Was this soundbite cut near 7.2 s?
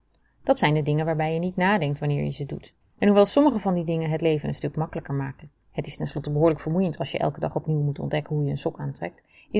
no; 2 cuts; at 2.8 s, 5.6 s

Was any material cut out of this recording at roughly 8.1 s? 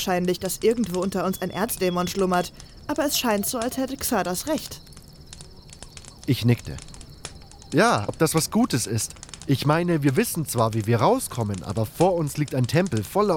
yes; 1 cut; at 8.1 s

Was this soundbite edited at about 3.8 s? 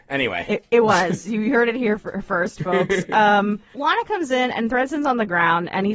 yes; 1 cut; at 3.8 s

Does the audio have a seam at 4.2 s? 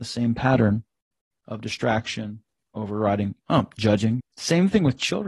yes; 1 cut; at 4.2 s

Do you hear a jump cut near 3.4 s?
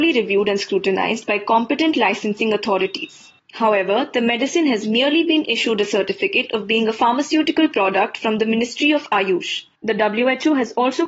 no; 0 cuts

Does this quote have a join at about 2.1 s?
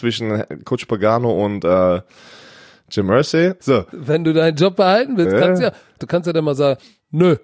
no; 2 cuts; at 3.6 s, 6.0 s

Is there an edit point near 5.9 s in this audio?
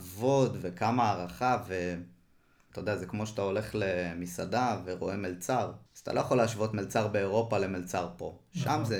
yes; 2 cuts; at 2.7 s, 5.9 s

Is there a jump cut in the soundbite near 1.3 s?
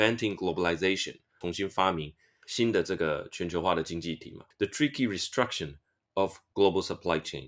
yes; 1 cut; at 1.3 s

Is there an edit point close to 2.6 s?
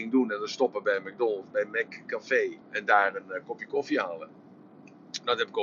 yes; 1 cut; at 2.6 s

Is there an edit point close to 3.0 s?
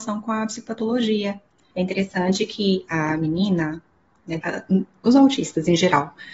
no; 2 cuts; at 1.7 s, 4.4 s

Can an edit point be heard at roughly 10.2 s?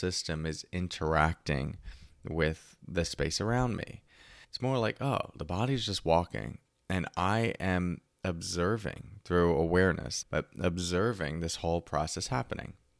yes; 2 cuts; at 4.4 s, 10.2 s

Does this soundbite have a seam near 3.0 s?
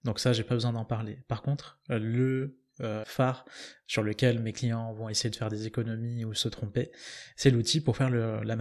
yes; 1 cut; at 3.0 s

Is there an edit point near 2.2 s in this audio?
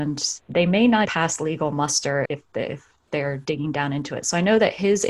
yes; 2 cuts; at 1.0 s, 2.2 s

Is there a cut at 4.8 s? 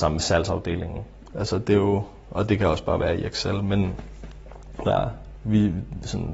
yes; 2 cuts; at 1.3 s, 4.8 s

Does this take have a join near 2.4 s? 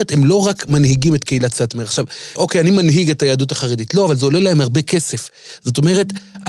yes; 1 cut; at 2.4 s

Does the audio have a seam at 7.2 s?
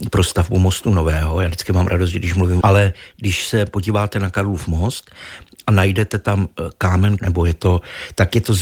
yes; 2 cuts; at 2.6 s, 7.2 s

